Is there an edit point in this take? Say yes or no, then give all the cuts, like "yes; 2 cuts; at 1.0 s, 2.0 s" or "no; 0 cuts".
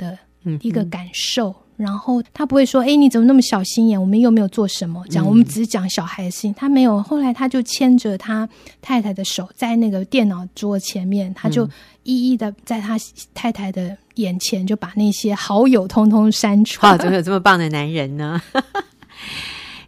yes; 1 cut; at 16.8 s